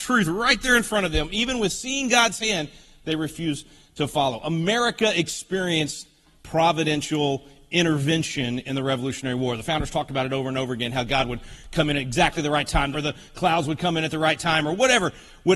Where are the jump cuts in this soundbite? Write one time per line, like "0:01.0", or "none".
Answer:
0:12.9